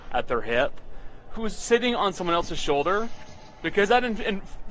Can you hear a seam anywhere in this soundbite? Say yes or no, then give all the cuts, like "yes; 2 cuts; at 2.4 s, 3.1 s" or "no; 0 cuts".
no; 0 cuts